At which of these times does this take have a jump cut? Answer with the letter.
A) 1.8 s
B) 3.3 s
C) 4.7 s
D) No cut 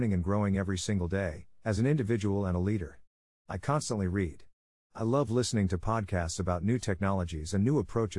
D